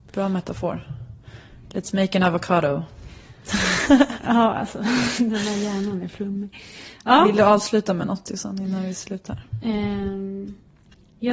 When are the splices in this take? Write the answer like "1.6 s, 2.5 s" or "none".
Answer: none